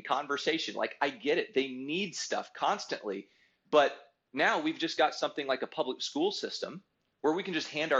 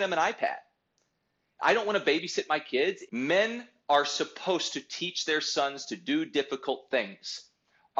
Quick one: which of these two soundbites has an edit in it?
second; 1 cut; at 3.1 s

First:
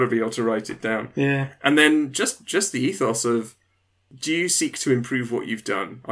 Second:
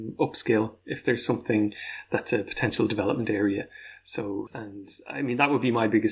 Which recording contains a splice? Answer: second; 1 cut; at 4.5 s

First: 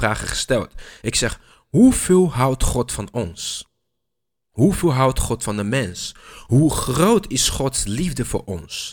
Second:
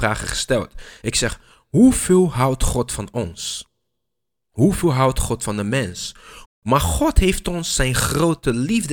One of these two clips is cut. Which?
second; 1 cut; at 6.4 s

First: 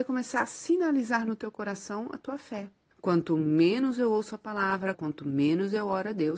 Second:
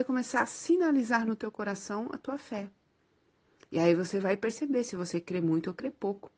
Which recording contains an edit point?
first; 2 cuts; at 2.9 s, 4.9 s

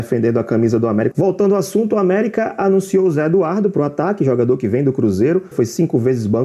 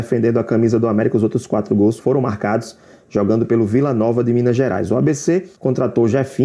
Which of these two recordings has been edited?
first; 2 cuts; at 1.1 s, 5.5 s

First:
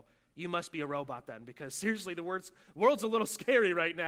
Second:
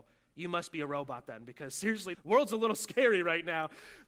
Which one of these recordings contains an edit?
second; 1 cut; at 2.1 s

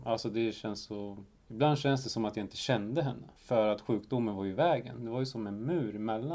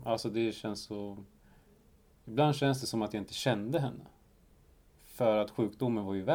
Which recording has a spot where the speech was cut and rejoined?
first; 2 cuts; at 1.4 s, 3.4 s

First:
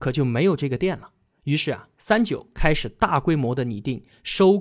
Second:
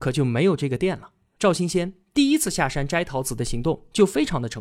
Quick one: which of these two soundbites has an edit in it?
second; 1 cut; at 1.4 s

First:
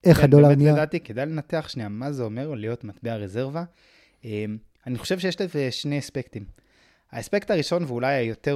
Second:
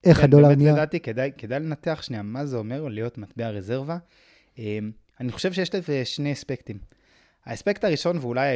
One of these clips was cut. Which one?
first; 1 cut; at 1.0 s

